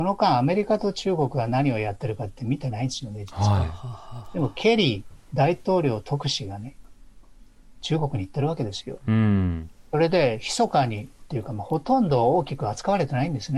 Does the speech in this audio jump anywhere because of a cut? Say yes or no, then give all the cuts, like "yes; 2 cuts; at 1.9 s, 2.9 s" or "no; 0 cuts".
no; 0 cuts